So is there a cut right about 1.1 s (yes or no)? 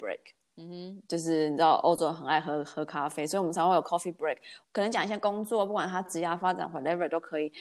no